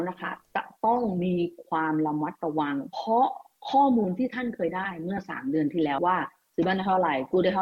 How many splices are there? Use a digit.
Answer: 1